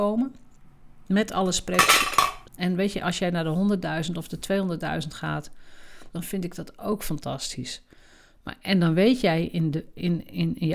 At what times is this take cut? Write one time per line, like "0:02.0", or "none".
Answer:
0:02.4
0:06.1